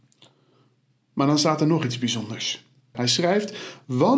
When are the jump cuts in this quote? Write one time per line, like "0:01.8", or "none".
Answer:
0:02.9